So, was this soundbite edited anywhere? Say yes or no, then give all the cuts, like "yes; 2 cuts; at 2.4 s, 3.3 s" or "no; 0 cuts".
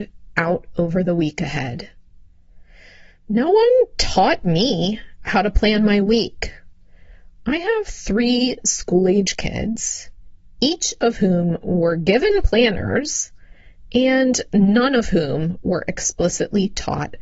no; 0 cuts